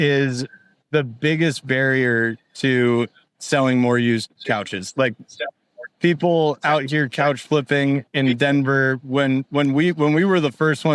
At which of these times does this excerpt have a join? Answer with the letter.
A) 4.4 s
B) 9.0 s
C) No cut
A